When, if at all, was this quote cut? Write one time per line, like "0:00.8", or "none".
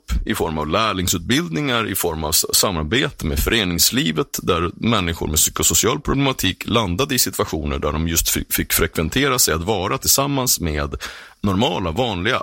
none